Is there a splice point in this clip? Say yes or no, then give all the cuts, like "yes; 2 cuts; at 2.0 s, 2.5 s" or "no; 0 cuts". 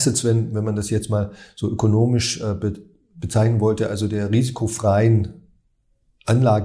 no; 0 cuts